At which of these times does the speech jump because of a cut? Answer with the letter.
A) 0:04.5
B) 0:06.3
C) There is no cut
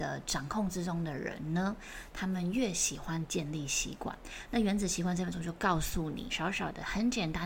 B